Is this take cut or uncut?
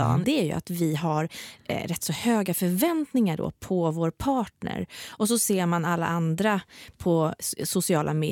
uncut